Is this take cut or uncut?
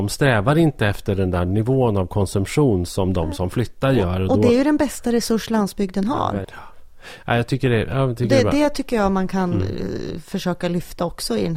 cut